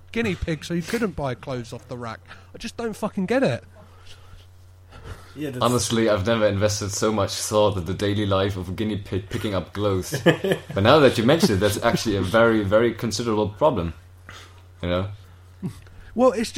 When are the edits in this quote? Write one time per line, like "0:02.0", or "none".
none